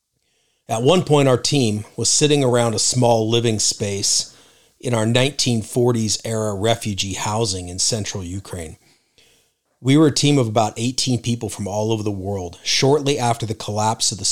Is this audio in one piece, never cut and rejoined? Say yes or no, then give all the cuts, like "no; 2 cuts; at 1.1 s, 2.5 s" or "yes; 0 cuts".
yes; 0 cuts